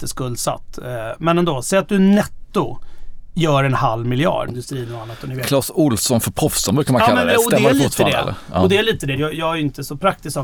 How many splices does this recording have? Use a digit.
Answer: 2